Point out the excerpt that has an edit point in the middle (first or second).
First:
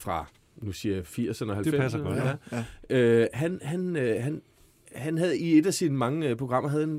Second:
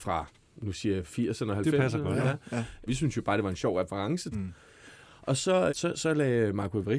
second